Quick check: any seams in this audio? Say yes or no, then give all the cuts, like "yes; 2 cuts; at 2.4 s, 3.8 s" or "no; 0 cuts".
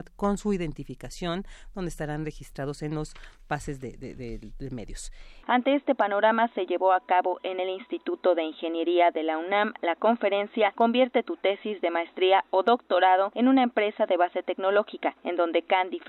yes; 1 cut; at 5.4 s